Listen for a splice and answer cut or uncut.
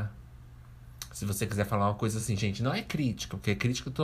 uncut